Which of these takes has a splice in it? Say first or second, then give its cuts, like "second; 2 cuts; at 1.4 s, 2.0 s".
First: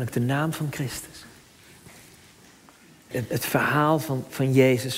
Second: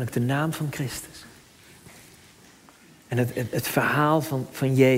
first; 1 cut; at 3.1 s